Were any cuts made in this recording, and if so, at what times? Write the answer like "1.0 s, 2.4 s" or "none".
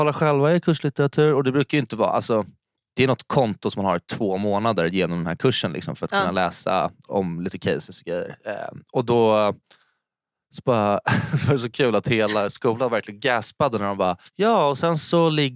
14.3 s